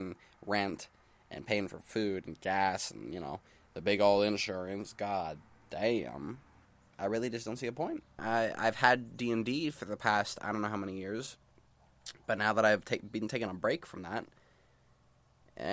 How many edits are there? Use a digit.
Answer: 1